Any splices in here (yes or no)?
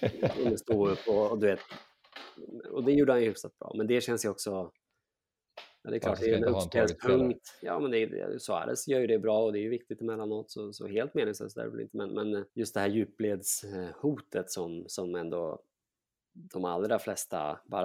yes